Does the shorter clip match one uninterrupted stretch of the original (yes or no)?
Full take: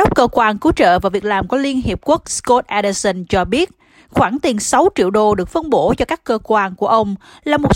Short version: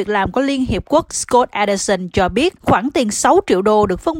no